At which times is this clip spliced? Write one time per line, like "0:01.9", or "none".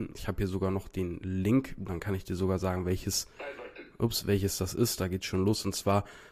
none